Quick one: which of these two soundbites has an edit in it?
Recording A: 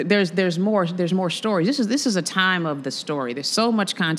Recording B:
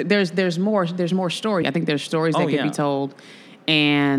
B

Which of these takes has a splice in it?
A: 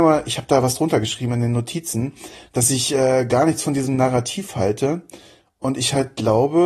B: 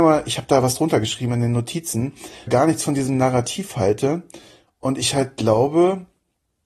B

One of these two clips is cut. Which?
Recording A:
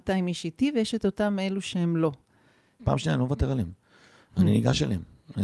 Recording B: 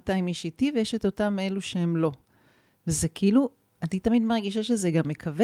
A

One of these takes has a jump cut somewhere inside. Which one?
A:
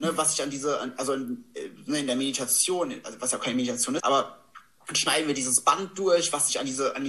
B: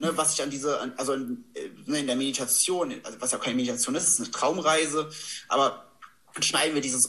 A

